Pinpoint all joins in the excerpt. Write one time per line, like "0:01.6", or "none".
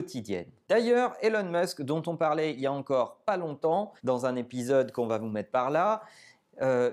0:04.0